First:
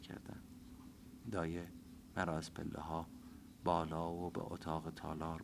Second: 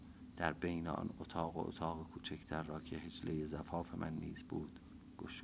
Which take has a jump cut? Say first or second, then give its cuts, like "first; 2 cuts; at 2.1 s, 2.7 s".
first; 1 cut; at 1.2 s